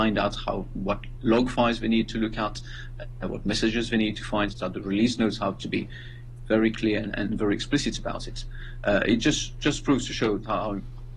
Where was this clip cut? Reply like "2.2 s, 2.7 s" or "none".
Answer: 4.5 s